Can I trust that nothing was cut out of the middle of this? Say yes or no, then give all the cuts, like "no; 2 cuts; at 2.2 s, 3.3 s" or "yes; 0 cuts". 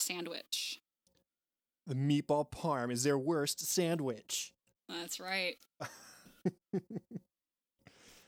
yes; 0 cuts